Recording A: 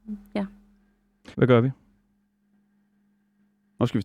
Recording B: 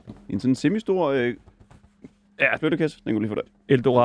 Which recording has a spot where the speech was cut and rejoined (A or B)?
A